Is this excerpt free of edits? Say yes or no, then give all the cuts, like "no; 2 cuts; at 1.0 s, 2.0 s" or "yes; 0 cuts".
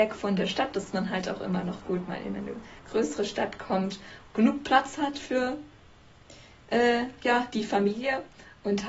yes; 0 cuts